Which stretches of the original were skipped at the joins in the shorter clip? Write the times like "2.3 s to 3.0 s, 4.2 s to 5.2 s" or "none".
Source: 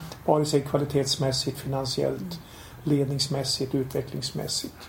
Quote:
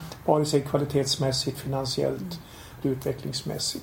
2.8 s to 3.7 s